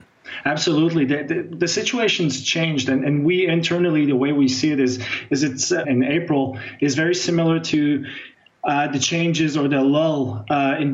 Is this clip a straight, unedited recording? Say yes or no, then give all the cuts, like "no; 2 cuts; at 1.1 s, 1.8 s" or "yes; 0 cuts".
no; 1 cut; at 5.8 s